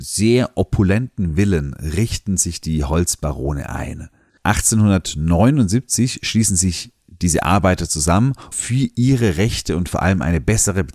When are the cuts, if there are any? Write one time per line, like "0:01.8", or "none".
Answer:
0:04.3
0:08.5